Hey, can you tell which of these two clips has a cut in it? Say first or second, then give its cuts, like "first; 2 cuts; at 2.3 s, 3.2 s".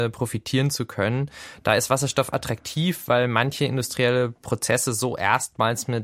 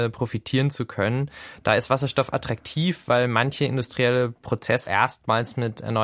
second; 1 cut; at 4.9 s